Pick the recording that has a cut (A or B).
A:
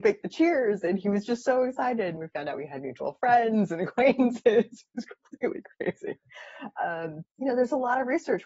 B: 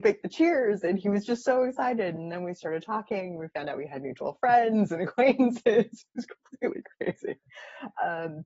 A